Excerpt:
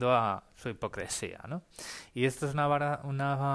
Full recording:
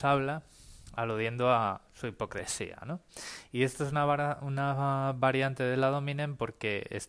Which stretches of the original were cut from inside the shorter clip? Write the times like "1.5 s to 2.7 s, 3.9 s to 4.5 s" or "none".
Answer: none